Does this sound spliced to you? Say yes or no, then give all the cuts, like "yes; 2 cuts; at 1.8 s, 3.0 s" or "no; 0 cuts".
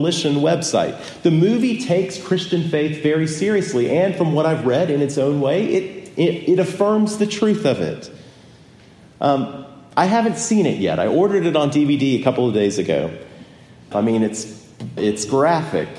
yes; 2 cuts; at 13.9 s, 15.0 s